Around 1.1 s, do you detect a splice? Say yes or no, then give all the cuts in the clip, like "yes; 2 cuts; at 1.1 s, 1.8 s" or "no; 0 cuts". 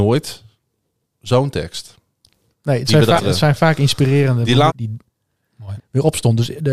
no; 3 cuts; at 3.2 s, 4.7 s, 5.8 s